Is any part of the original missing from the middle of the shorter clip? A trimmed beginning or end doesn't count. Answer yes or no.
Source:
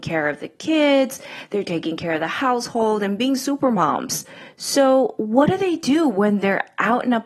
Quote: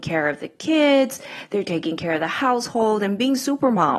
no